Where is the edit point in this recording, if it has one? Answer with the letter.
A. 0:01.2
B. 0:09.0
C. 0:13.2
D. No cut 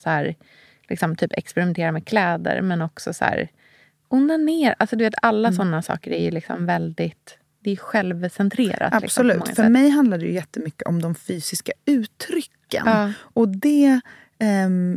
D